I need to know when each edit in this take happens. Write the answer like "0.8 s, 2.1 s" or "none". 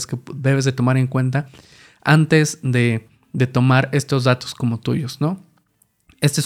none